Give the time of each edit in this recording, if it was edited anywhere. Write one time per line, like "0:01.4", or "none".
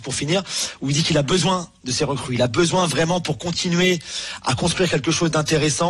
none

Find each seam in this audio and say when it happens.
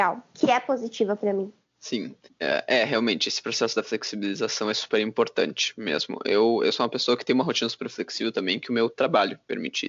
none

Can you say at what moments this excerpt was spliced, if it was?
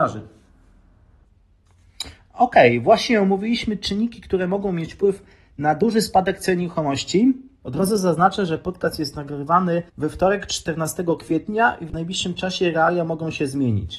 0:07.6
0:09.9

